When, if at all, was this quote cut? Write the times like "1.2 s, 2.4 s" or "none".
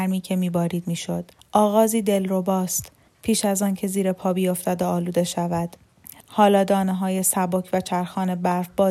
1.4 s, 6.2 s

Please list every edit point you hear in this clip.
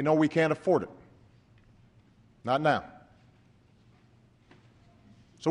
none

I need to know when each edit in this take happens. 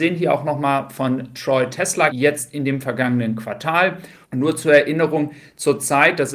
2.1 s, 4.2 s

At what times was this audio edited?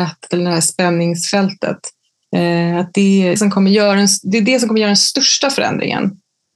2.2 s, 3.4 s

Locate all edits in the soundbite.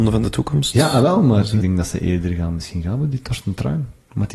1.6 s

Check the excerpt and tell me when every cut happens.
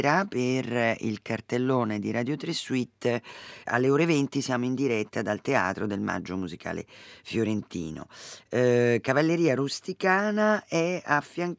3.7 s

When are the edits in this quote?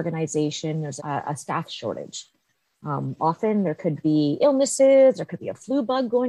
1.0 s

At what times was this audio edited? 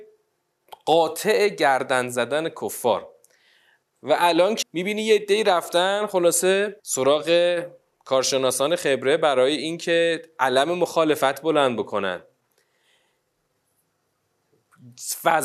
4.6 s, 6.8 s

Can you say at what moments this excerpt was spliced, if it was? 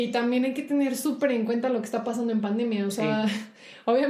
none

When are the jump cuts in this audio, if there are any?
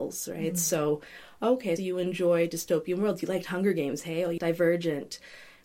1.8 s, 4.4 s

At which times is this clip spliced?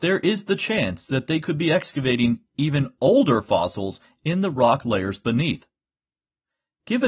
none

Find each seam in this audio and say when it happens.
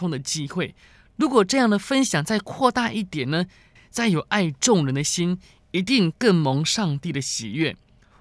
3.8 s

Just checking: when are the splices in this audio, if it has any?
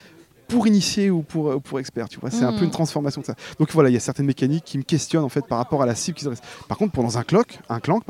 none

